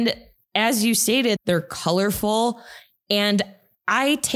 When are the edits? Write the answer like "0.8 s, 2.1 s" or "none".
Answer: 1.4 s